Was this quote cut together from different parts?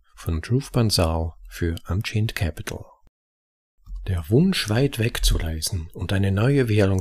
no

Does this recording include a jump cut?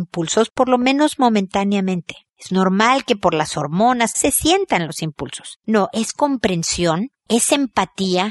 yes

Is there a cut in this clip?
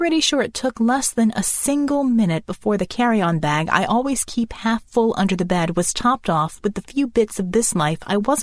no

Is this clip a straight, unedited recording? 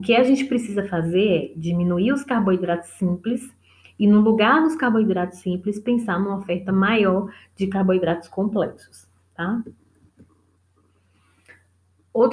yes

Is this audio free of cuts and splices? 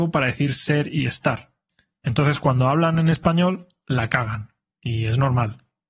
yes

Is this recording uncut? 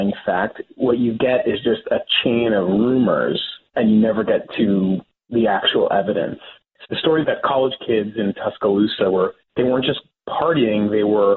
no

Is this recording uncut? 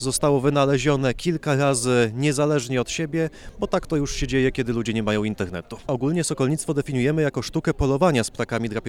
yes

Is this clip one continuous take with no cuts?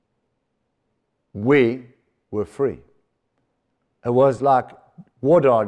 yes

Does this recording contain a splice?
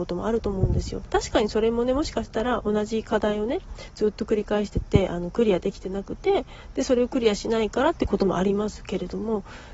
no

